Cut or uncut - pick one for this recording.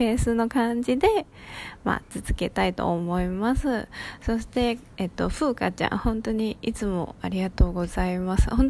uncut